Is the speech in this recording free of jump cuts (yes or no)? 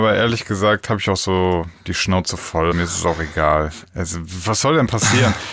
no